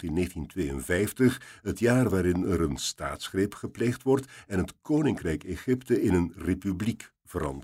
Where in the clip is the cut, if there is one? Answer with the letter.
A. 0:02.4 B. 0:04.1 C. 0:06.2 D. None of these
D